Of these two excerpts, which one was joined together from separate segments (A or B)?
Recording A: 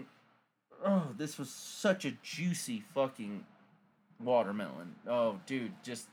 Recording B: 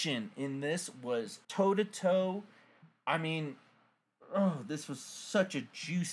B